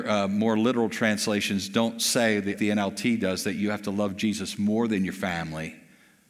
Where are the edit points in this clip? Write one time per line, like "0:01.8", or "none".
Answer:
0:02.6